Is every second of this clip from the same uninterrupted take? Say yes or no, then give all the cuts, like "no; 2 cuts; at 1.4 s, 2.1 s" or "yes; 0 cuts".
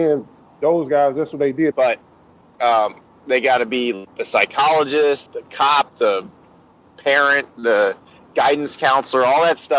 no; 3 cuts; at 1.7 s, 4.1 s, 5.3 s